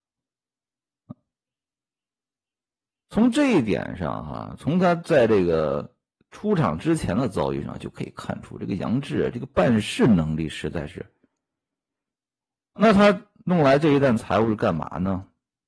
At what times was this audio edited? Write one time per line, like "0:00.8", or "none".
0:12.8